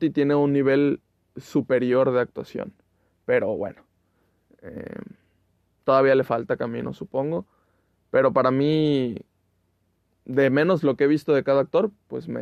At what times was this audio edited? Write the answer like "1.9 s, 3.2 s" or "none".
none

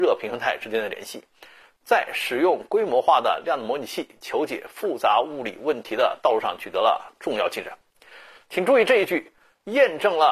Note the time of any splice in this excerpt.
none

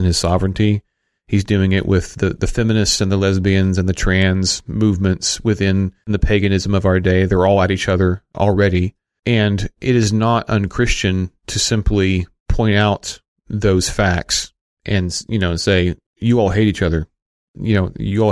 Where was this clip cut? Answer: none

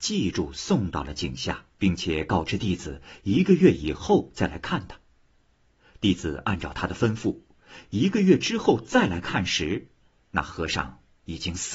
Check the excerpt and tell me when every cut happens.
1.7 s

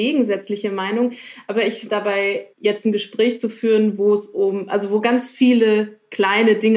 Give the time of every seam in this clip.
1.9 s

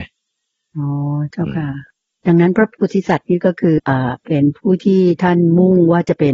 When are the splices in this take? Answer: 3.8 s

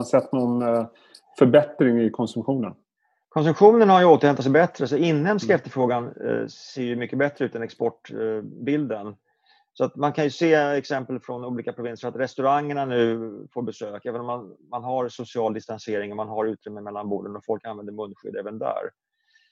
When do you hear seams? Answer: none

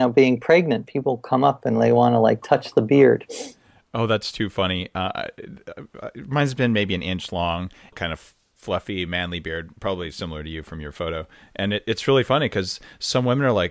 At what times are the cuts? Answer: 7.9 s

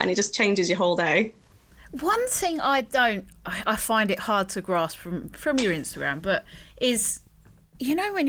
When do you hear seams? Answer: none

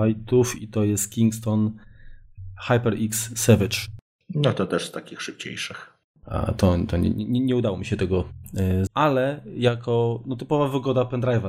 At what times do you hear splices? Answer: 6.2 s, 8.9 s

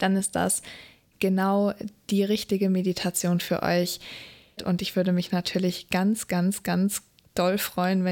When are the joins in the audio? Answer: 4.6 s

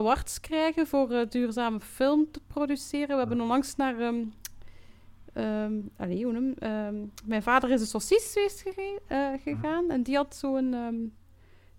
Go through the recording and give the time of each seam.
none

